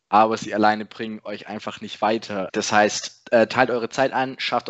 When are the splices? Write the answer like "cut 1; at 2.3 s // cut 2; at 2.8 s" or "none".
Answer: cut 1; at 2.5 s